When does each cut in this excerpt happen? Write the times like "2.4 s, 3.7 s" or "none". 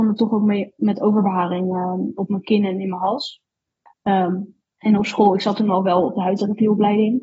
3.9 s